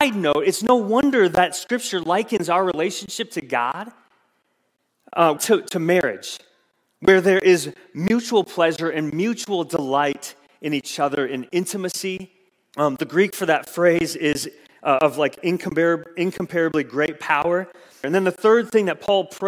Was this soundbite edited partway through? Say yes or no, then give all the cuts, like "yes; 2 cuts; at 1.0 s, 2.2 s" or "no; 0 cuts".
yes; 3 cuts; at 5.4 s, 12.7 s, 18.0 s